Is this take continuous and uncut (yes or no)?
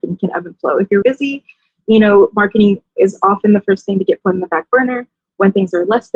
no